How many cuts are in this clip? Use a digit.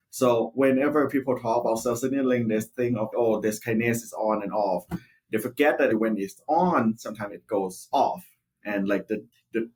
2